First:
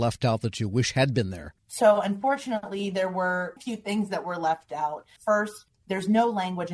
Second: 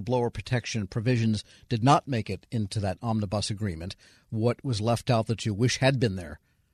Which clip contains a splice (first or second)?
first